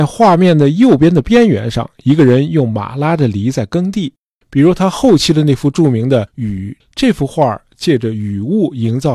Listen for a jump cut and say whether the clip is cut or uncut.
cut